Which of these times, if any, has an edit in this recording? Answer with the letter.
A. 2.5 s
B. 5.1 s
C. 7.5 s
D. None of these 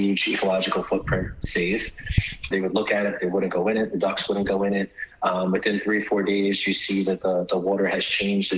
A